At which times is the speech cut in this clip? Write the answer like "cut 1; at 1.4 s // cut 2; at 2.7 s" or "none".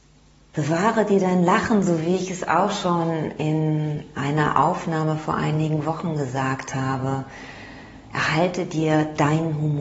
none

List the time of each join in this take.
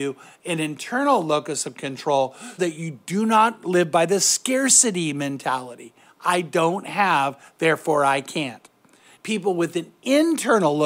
cut 1; at 2.6 s // cut 2; at 9.1 s

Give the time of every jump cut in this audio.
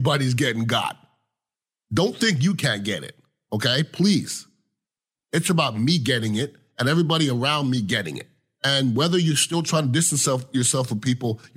cut 1; at 5.2 s

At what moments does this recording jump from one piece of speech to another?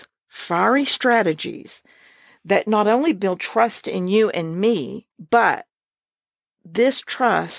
cut 1; at 5.1 s

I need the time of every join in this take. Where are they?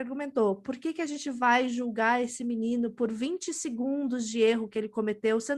none

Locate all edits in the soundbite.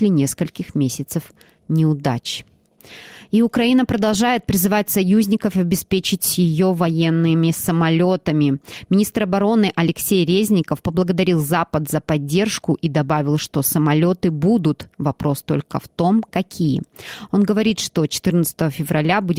none

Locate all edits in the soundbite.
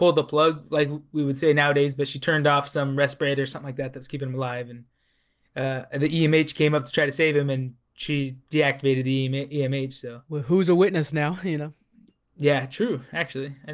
none

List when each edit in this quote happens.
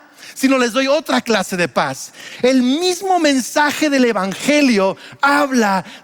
none

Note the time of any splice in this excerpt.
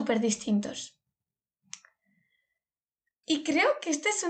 cut 1; at 3.2 s

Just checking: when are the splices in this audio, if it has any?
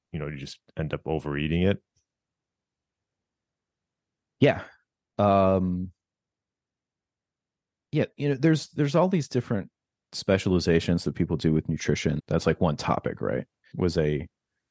cut 1; at 12.2 s // cut 2; at 13.7 s

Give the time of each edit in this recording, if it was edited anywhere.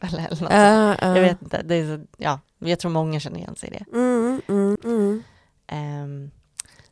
cut 1; at 4.8 s

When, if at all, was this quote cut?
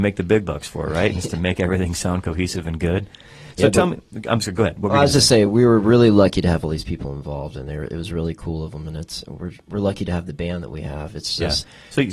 none

